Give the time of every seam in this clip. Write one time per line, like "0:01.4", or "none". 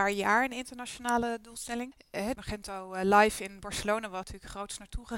0:02.3